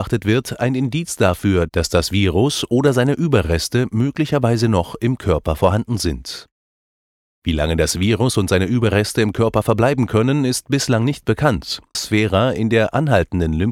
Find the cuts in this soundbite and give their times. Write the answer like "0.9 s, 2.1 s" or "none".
11.9 s